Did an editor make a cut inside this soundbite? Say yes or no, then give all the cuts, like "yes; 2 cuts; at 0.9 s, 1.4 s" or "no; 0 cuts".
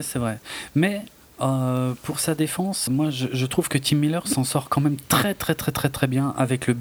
yes; 1 cut; at 2.9 s